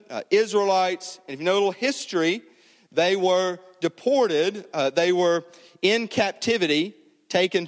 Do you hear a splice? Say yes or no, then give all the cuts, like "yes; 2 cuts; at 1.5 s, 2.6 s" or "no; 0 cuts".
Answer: no; 0 cuts